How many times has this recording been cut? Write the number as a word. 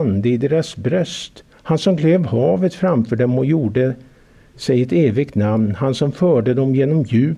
one